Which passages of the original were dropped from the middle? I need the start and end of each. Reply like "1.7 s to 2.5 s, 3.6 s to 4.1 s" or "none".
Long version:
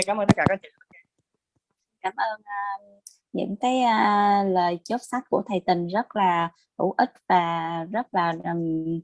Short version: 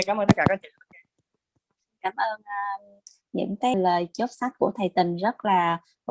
3.7 s to 4.4 s